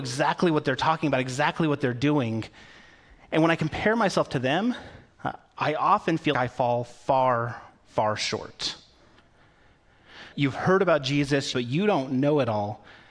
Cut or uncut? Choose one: cut